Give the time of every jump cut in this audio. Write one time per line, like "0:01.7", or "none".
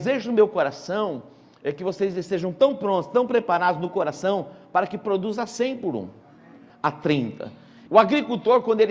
0:06.7
0:07.9